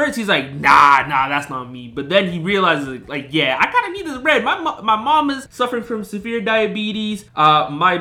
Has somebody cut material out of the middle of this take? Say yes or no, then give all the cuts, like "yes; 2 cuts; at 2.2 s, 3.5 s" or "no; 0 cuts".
no; 0 cuts